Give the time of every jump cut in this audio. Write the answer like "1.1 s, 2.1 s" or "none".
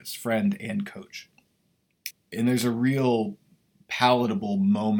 2.1 s